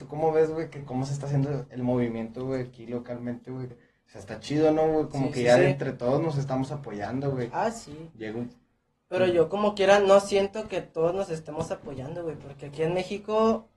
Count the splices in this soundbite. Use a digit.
1